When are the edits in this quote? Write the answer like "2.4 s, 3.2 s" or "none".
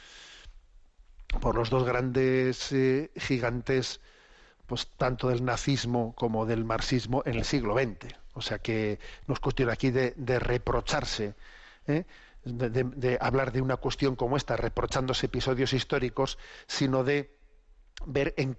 none